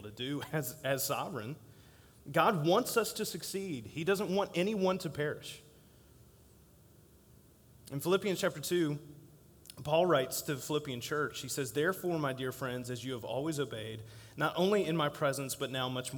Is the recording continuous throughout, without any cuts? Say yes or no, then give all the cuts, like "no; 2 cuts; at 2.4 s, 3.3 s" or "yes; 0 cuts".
yes; 0 cuts